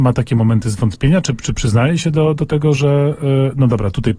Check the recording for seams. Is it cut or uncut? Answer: uncut